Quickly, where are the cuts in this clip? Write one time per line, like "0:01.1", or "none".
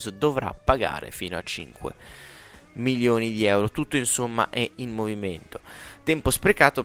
none